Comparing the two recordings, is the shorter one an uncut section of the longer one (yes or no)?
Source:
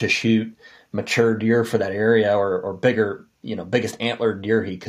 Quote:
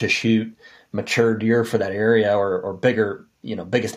yes